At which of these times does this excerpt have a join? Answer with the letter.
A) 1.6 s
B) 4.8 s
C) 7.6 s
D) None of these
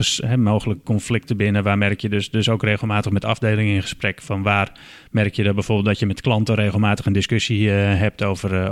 D